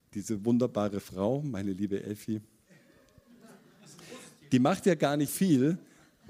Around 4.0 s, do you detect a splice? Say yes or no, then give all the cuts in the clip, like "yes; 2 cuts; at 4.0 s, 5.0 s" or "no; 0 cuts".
no; 1 cut; at 5.3 s